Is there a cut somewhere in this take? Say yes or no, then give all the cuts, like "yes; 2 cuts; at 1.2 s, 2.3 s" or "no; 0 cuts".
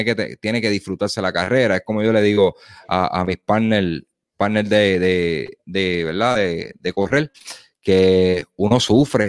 no; 0 cuts